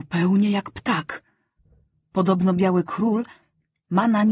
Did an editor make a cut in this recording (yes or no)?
no